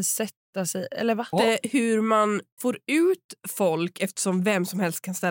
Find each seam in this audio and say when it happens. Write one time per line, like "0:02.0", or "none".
0:01.3
0:02.6